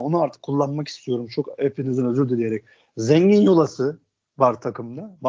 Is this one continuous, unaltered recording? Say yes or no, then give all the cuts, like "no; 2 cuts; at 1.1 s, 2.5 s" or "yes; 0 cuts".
yes; 0 cuts